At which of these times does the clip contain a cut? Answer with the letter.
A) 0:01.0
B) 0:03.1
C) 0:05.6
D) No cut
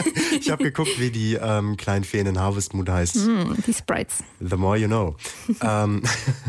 B